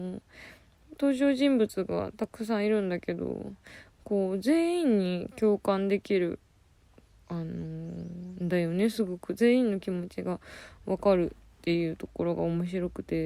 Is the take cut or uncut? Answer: uncut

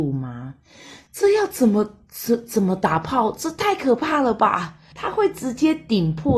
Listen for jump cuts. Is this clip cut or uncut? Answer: cut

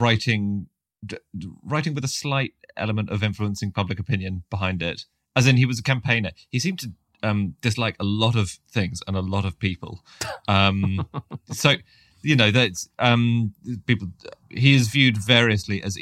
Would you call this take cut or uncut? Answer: cut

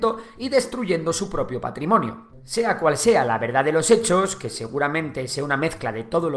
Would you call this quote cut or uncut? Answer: uncut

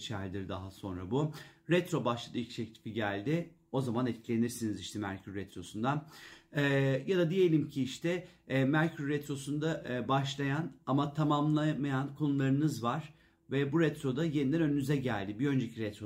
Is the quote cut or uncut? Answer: uncut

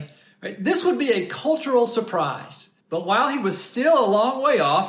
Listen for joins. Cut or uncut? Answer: cut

